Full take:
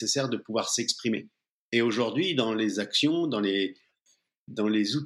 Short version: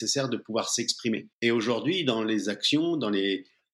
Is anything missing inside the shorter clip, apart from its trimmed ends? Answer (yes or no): yes